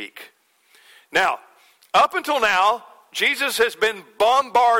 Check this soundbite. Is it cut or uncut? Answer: uncut